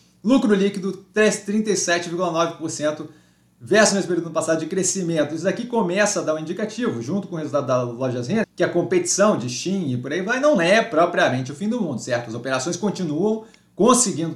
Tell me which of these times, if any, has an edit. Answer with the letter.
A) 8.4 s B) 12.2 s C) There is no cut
A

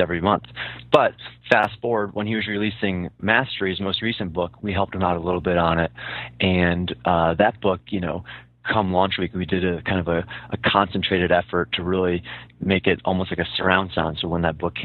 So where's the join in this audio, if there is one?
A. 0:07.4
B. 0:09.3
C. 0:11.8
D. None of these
D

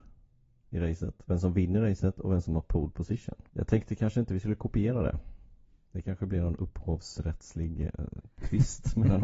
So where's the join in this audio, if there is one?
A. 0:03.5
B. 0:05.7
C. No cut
A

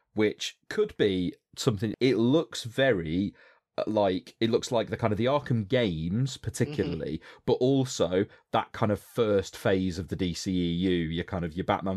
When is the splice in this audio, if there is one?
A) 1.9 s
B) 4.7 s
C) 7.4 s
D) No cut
A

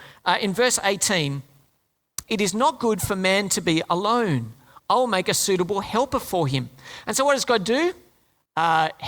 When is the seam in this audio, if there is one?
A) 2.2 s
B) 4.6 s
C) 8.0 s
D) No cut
A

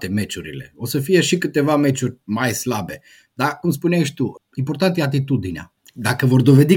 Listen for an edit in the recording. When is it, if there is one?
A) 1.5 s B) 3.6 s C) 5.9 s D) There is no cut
D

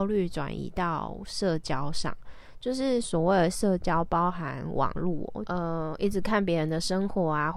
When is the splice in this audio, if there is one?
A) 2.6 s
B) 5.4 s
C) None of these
B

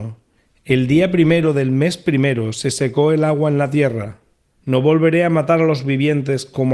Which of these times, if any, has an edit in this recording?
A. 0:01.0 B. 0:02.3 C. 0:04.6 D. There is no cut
C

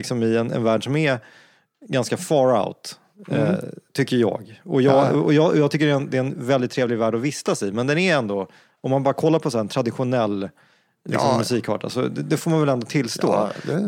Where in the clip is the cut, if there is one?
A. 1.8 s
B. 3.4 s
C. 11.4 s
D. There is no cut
D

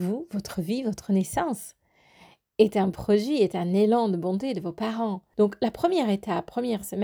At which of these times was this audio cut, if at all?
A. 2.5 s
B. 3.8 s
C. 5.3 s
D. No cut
C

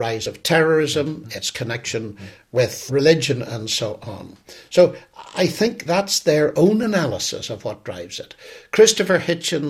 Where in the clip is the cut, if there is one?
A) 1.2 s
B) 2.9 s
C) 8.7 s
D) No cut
B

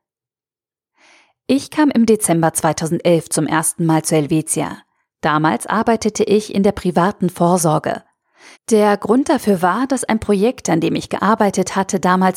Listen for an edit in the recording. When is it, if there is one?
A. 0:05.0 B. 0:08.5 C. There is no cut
B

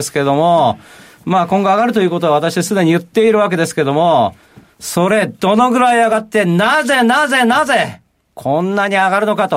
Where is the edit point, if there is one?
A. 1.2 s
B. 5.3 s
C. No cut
C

